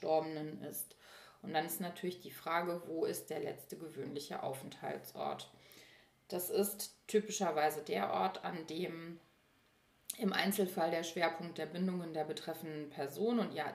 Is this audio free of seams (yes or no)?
yes